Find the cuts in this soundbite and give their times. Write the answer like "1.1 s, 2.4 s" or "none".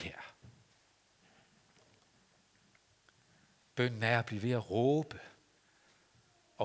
none